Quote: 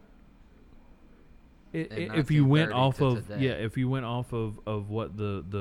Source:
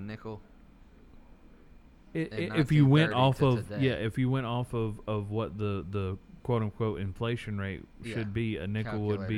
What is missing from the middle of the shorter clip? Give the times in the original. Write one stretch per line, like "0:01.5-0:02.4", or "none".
none